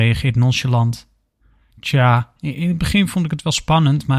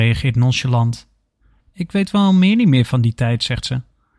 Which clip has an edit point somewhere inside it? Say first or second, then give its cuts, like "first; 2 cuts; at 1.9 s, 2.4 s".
second; 1 cut; at 1.6 s